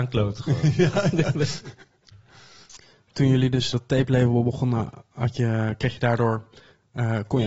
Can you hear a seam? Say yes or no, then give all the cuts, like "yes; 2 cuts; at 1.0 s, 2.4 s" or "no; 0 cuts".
yes; 1 cut; at 3.7 s